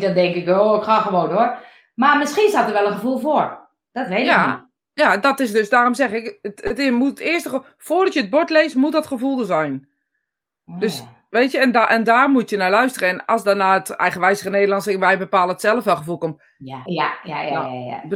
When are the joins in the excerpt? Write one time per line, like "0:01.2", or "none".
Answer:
0:16.9